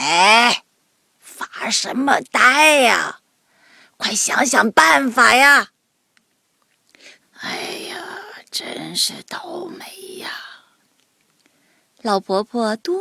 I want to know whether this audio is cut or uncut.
cut